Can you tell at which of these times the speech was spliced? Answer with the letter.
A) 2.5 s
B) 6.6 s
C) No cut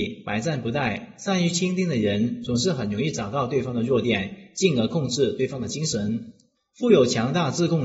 B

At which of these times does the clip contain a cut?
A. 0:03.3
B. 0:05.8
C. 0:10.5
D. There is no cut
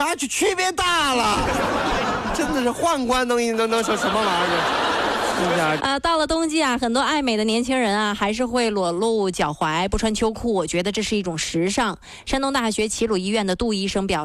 B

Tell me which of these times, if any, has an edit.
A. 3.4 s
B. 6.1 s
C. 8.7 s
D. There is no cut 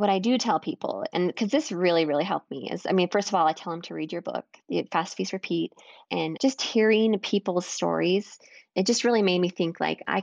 B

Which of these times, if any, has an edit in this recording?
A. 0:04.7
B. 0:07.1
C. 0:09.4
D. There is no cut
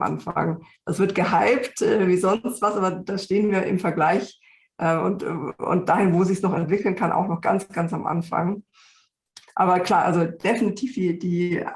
C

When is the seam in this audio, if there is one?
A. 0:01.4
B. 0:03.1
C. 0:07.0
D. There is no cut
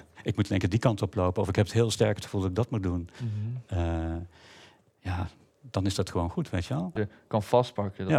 C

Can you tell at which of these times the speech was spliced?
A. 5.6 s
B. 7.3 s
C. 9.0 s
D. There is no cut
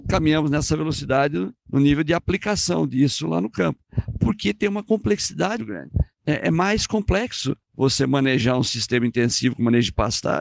A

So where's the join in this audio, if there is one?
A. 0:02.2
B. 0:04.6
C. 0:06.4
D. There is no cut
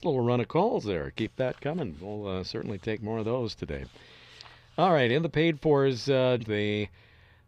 C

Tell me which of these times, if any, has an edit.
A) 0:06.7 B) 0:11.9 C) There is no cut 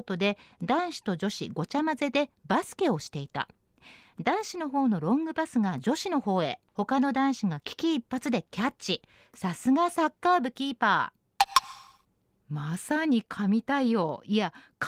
A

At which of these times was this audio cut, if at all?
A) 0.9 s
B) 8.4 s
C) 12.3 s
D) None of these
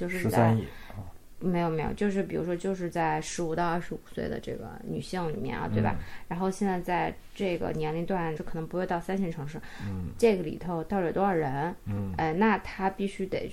B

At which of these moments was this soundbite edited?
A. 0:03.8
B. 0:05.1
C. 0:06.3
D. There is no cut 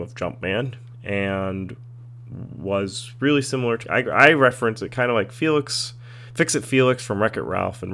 A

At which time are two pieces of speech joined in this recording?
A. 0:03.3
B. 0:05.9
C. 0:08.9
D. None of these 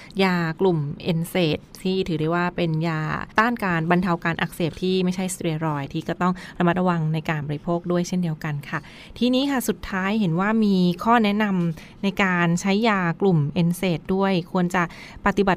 A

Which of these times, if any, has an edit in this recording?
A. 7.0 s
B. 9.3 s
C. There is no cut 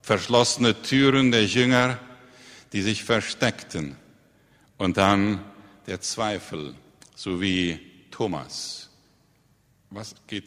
C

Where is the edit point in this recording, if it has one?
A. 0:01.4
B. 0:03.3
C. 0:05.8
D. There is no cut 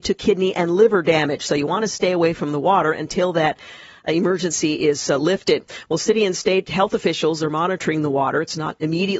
D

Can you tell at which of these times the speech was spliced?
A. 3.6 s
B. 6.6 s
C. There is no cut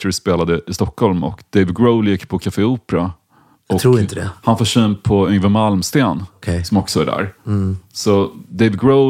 C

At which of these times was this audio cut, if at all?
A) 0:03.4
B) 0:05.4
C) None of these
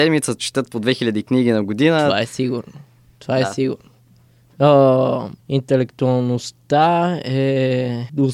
B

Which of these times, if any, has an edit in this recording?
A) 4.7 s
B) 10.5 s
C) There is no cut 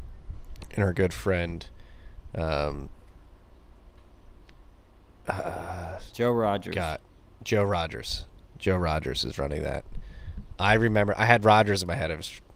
B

